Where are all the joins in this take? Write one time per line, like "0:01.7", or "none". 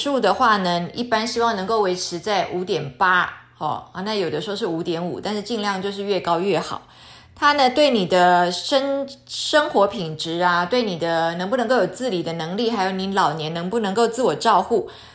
none